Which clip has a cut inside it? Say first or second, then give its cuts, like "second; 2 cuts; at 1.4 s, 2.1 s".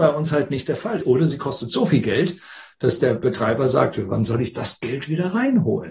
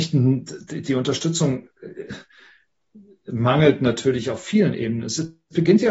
first; 1 cut; at 1.0 s